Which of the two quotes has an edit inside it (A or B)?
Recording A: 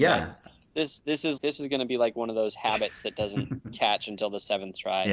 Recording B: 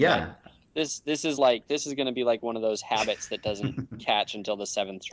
A